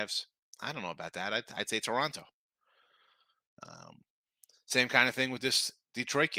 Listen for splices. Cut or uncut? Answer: uncut